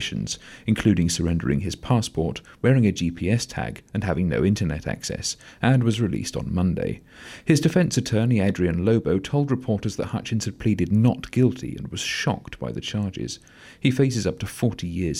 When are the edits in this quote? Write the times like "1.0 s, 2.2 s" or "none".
none